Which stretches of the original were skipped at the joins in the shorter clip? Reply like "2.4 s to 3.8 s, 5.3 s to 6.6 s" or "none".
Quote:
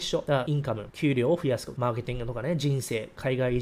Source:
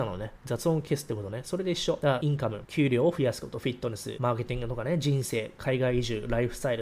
3.5 s to 4.2 s